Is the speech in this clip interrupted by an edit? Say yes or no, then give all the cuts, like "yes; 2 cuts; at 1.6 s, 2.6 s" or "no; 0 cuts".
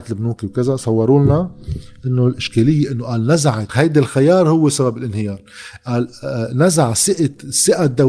yes; 1 cut; at 3.7 s